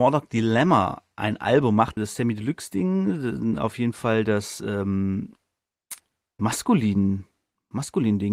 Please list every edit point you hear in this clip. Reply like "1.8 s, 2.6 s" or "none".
2.0 s, 6.4 s